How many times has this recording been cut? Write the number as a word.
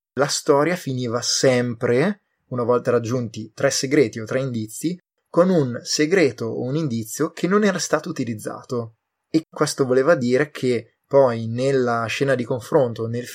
one